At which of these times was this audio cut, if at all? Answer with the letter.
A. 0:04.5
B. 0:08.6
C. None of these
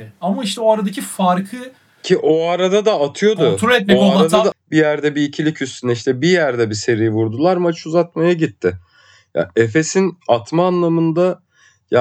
A